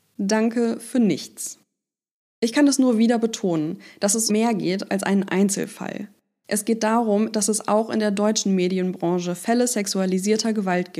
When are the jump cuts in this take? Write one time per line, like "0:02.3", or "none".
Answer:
0:04.3
0:07.3